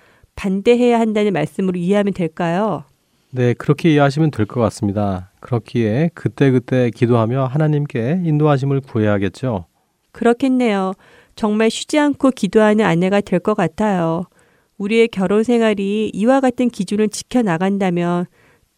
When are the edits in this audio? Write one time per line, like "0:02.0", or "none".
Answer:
none